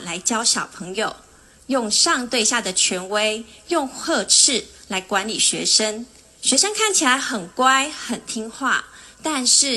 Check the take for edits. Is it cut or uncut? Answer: uncut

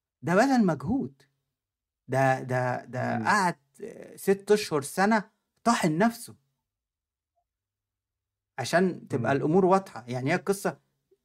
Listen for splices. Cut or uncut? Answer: uncut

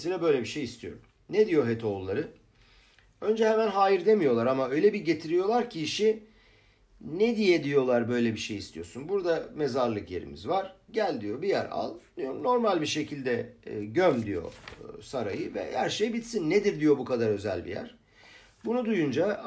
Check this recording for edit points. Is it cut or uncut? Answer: uncut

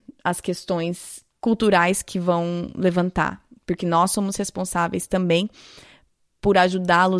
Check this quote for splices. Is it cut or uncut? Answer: cut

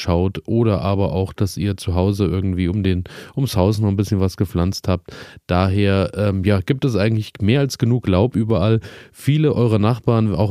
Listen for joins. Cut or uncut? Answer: uncut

